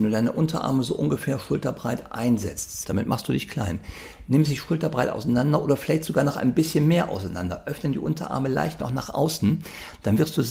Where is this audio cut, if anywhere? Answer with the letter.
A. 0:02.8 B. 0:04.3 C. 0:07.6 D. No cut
A